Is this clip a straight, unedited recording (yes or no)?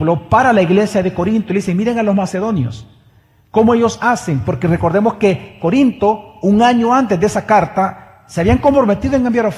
yes